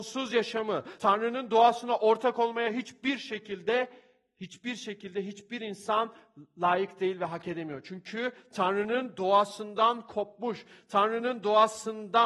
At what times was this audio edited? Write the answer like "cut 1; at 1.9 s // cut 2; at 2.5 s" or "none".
cut 1; at 1.0 s